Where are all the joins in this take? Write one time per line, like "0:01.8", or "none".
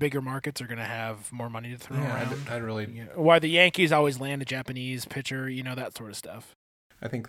none